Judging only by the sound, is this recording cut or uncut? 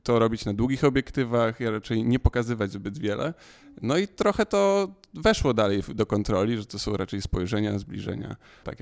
uncut